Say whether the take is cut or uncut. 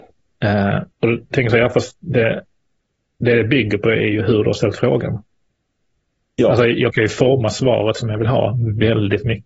cut